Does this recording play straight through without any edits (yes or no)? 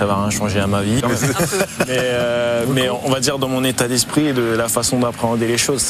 no